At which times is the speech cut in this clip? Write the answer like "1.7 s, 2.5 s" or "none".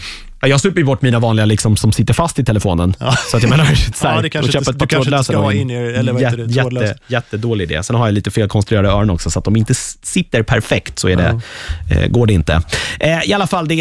3.9 s